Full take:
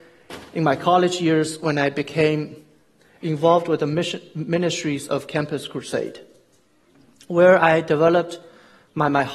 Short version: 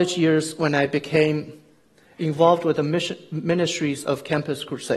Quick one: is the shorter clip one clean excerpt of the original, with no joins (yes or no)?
yes